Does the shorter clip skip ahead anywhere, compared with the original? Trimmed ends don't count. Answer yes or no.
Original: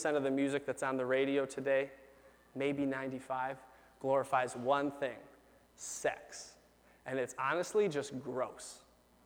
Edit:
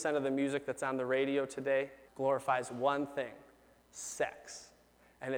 yes